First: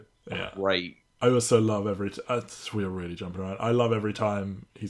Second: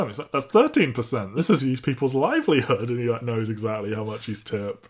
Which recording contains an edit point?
second; 1 cut; at 1.6 s

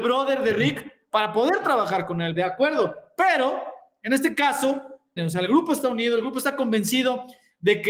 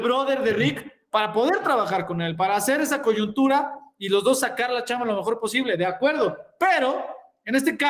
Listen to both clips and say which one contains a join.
first; 2 cuts; at 2.3 s, 5.2 s

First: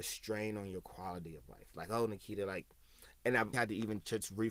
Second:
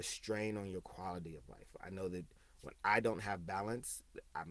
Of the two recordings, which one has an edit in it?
first; 2 cuts; at 1.7 s, 3.5 s

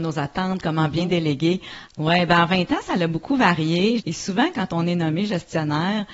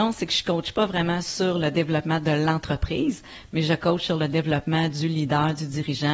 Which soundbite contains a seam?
first; 2 cuts; at 1.9 s, 4.0 s

